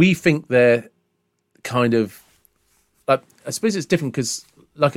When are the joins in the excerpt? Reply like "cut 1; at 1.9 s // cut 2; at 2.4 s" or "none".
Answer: none